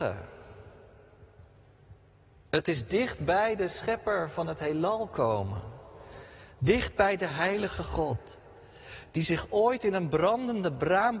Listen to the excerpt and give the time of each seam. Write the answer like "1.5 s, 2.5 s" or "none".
none